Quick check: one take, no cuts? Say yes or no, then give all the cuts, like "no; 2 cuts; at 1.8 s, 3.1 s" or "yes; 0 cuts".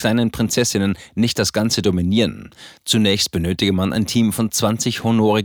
yes; 0 cuts